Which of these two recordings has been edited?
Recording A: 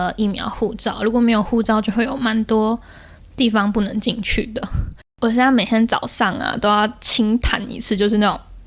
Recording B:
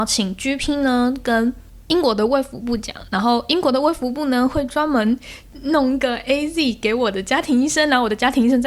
A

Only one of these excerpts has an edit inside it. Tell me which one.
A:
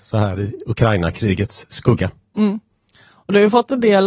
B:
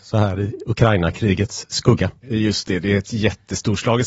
B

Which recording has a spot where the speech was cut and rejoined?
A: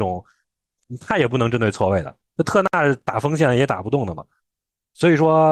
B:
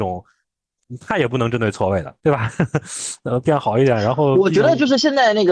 B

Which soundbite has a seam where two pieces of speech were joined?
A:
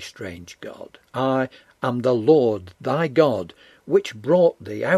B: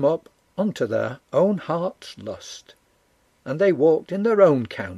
A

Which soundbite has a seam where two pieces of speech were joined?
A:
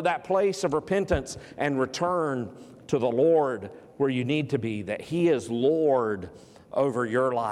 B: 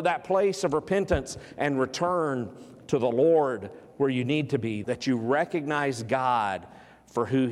B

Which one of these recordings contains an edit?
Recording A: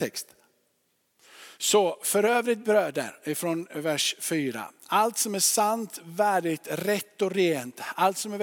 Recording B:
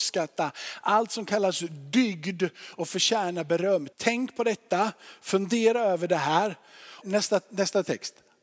B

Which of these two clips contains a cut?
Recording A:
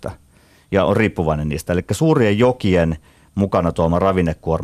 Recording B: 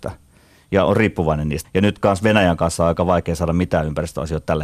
B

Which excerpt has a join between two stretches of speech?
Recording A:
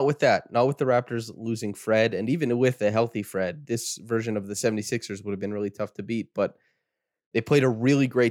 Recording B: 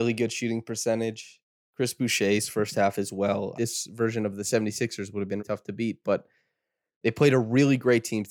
B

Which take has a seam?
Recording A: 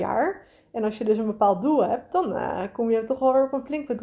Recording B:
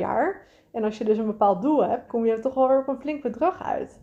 B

